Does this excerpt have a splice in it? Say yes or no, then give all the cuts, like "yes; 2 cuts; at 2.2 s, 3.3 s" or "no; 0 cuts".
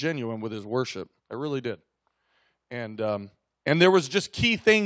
yes; 1 cut; at 1.2 s